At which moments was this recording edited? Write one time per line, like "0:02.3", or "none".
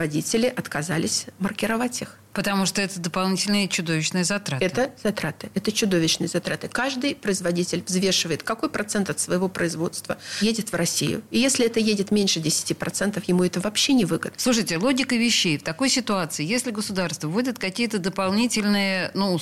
none

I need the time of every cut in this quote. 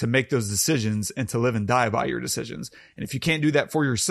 none

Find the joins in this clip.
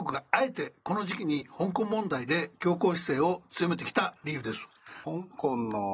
0:05.0

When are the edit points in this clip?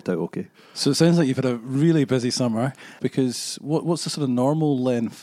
0:03.0

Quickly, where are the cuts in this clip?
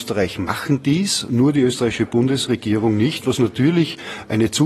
none

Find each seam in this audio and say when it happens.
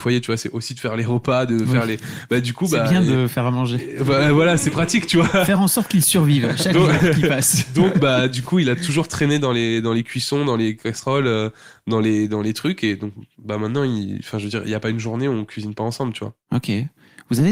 none

